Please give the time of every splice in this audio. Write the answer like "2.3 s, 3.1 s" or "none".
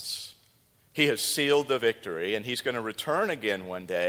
none